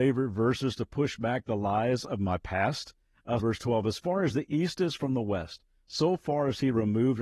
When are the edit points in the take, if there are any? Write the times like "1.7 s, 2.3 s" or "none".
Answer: 3.4 s